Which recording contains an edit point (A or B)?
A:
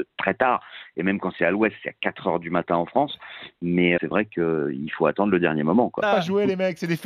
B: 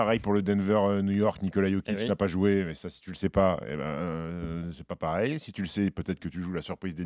A